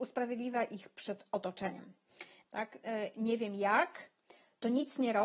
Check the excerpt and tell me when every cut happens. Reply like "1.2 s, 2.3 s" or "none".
2.4 s